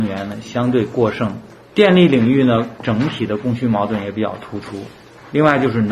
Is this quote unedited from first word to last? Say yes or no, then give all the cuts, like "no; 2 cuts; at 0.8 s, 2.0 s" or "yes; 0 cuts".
yes; 0 cuts